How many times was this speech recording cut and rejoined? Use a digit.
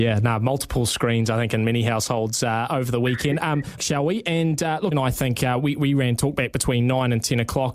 2